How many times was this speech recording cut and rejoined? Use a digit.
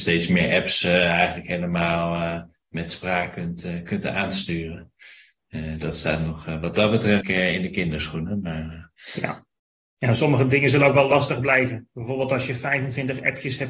1